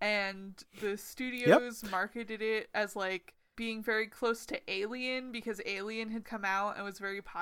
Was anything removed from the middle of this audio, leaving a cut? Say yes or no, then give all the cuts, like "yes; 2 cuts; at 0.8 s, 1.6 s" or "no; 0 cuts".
yes; 1 cut; at 6.2 s